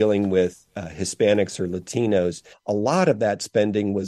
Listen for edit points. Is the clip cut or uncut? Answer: cut